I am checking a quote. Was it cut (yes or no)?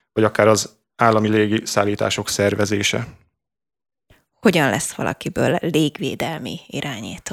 no